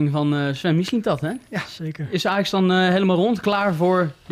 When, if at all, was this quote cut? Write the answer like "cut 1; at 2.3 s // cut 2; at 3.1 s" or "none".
none